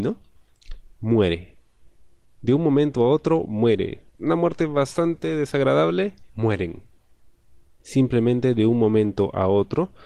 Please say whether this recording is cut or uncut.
cut